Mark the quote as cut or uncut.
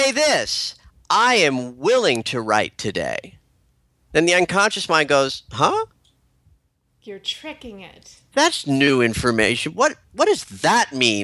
uncut